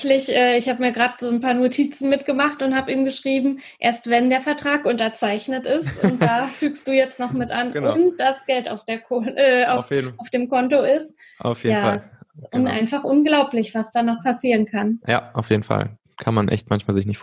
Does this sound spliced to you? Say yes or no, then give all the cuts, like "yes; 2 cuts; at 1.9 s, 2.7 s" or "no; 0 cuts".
no; 0 cuts